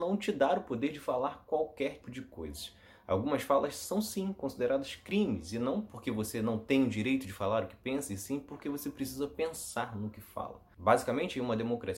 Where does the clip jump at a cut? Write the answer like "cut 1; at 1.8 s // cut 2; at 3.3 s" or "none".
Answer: cut 1; at 2.0 s